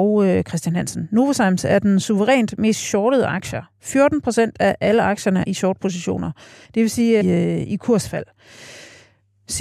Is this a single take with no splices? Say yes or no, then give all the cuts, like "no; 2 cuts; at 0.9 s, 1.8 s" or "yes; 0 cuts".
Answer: no; 2 cuts; at 5.4 s, 7.2 s